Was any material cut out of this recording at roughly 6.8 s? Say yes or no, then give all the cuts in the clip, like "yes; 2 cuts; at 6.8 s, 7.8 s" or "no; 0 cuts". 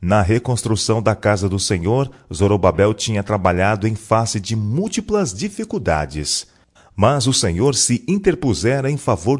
yes; 1 cut; at 6.8 s